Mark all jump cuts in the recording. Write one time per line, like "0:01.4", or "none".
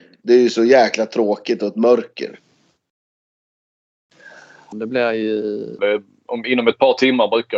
0:04.7
0:05.8